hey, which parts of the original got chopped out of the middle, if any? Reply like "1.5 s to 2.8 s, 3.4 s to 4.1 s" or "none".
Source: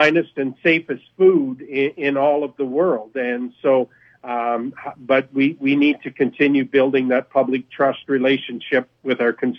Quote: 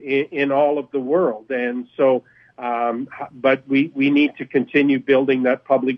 none